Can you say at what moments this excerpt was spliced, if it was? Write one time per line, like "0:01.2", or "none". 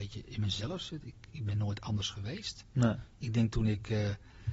none